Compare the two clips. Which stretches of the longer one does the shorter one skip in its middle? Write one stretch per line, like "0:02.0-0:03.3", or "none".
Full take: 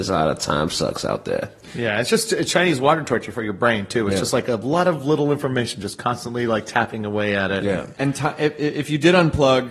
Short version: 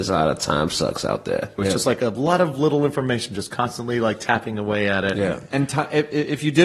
0:01.6-0:04.0

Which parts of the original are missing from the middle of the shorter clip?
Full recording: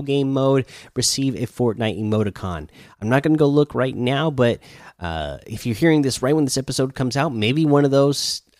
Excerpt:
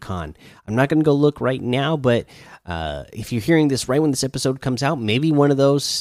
none

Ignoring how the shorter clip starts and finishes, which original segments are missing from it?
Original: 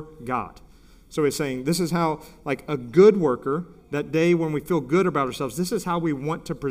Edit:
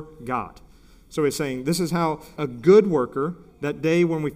0:02.4-0:02.7

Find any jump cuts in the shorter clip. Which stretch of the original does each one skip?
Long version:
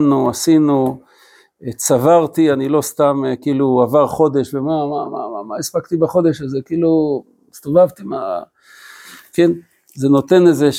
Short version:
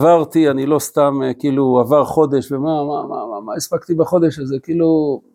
none

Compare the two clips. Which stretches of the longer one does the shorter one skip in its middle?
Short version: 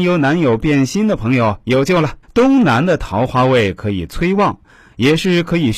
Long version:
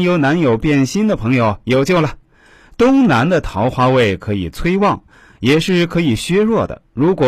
0:02.2-0:02.7

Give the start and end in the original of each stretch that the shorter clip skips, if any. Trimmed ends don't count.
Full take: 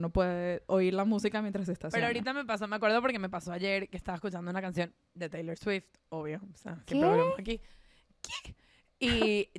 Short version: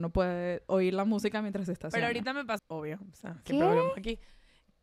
0:02.6-0:06.0

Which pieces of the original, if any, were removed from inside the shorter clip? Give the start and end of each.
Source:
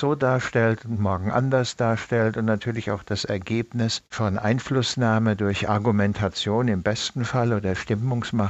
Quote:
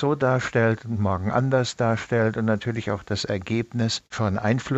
none

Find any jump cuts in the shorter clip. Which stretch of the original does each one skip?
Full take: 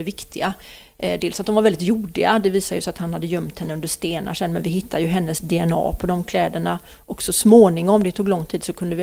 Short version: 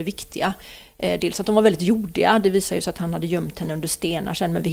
none

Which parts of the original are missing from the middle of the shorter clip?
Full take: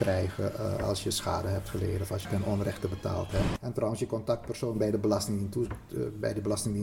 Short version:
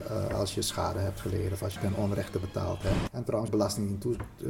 0:04.0-0:05.0

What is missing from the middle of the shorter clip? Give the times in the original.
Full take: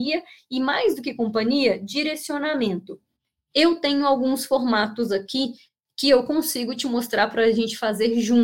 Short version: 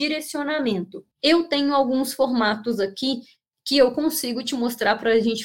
0:03.1-0:03.4

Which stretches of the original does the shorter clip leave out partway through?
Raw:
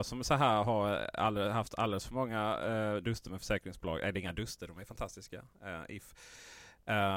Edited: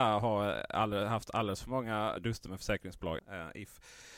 0:02.6-0:03.0
0:04.0-0:05.5

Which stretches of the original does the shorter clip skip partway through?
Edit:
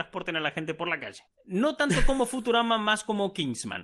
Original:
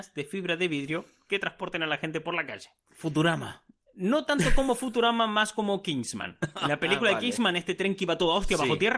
0:02.7-0:03.8

